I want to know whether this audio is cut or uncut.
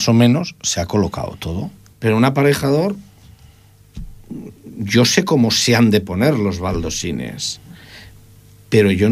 cut